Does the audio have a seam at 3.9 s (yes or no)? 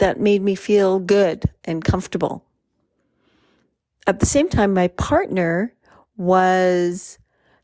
no